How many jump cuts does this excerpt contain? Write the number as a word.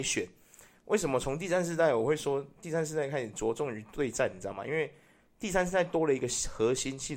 zero